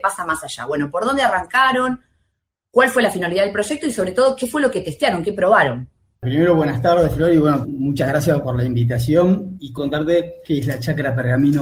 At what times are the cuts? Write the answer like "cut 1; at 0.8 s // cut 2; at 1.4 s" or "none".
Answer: none